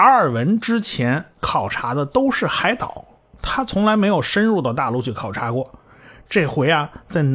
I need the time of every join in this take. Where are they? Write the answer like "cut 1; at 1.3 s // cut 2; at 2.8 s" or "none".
none